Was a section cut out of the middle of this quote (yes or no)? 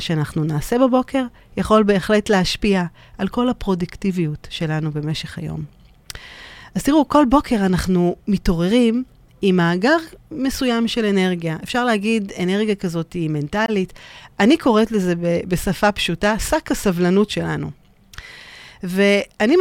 no